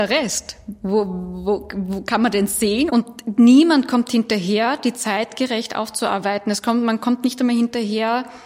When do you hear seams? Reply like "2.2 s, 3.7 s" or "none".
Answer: 2.9 s